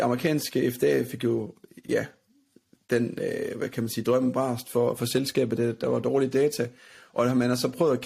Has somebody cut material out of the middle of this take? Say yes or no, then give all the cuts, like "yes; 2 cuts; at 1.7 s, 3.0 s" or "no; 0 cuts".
no; 0 cuts